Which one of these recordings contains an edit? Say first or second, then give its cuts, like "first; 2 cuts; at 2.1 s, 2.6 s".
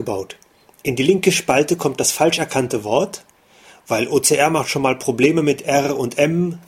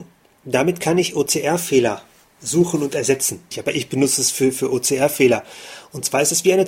second; 1 cut; at 3.5 s